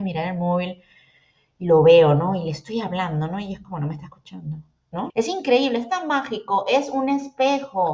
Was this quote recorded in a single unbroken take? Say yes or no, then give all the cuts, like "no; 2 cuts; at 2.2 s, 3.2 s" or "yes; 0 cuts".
no; 1 cut; at 5.1 s